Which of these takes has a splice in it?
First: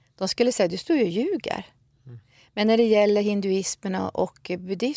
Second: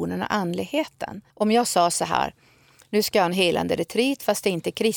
second; 1 cut; at 1.3 s

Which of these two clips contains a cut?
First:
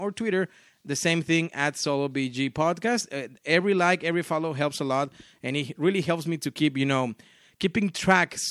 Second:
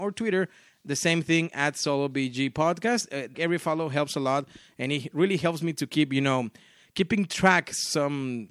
second; 1 cut; at 3.3 s

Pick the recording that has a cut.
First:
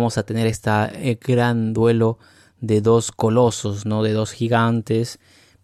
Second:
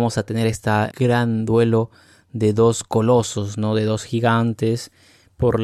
second; 1 cut; at 0.9 s

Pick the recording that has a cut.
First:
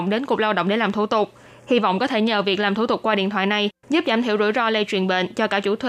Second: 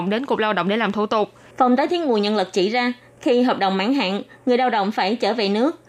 second; 1 cut; at 1.5 s

